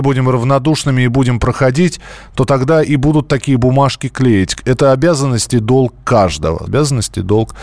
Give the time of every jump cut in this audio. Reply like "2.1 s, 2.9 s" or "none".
6.7 s